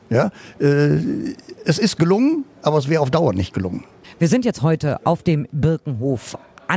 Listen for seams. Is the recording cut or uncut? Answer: uncut